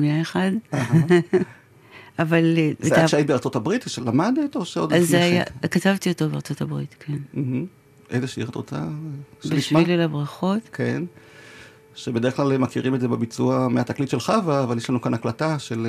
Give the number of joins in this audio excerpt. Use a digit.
0